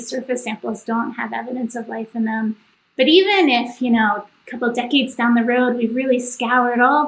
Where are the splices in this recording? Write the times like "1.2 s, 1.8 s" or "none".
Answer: none